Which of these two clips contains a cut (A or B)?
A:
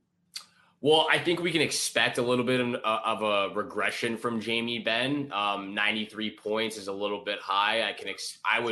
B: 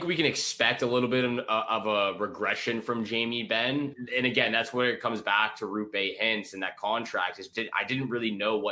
B